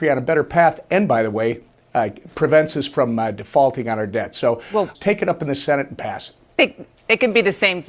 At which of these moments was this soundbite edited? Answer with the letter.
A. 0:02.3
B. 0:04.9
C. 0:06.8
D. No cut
B